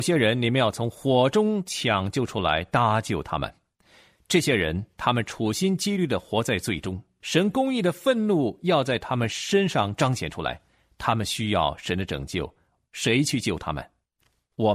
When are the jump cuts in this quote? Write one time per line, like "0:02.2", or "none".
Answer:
0:07.2